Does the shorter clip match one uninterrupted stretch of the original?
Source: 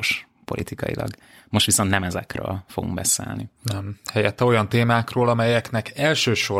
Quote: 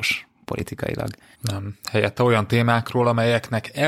no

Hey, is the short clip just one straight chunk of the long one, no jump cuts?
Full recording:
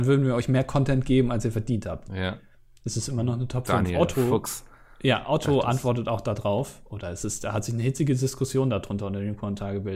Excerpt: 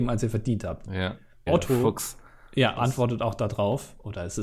no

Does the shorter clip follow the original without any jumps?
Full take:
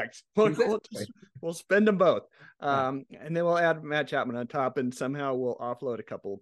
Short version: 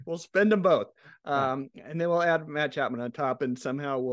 yes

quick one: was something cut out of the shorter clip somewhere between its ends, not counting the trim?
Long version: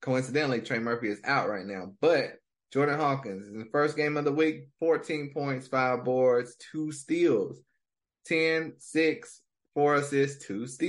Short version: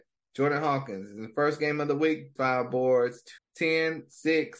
yes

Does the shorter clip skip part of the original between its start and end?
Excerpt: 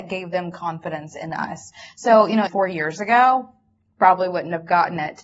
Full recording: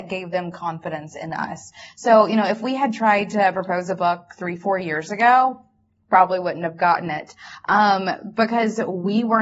yes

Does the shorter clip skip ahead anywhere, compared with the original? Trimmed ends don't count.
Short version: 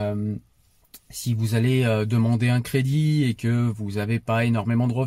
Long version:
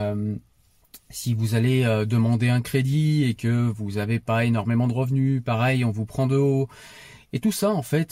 no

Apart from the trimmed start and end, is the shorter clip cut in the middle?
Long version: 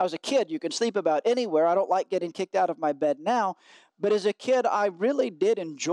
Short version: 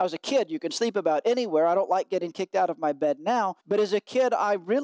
yes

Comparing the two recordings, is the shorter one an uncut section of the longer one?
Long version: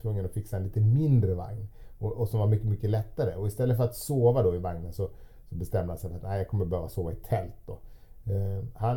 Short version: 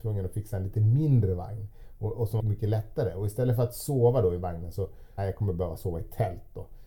no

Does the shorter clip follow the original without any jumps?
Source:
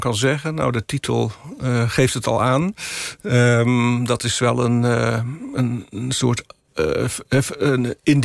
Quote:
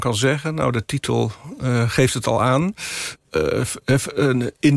no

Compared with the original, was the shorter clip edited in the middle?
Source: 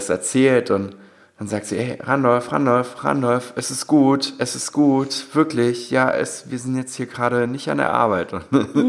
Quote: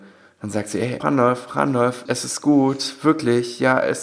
yes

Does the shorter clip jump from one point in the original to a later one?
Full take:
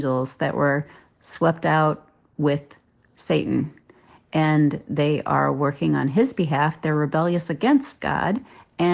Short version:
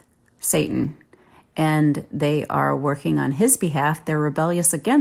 no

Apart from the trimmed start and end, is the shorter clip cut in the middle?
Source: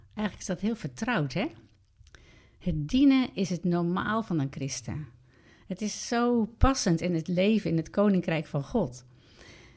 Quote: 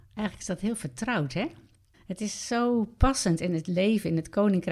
yes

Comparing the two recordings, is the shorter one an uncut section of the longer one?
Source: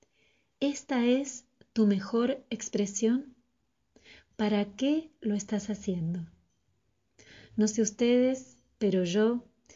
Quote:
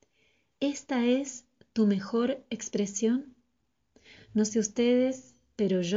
no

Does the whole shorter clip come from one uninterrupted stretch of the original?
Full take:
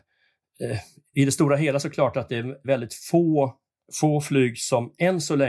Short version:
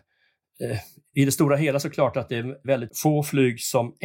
no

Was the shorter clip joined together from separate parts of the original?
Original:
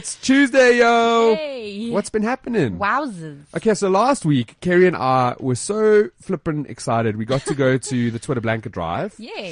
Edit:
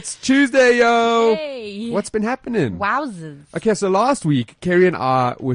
no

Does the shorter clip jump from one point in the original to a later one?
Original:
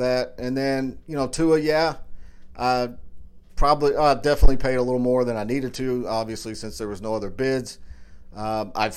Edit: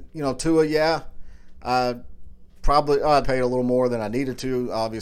yes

